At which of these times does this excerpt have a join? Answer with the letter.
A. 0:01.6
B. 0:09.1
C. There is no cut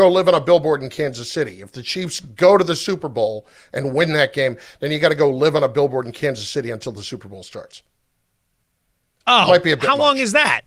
C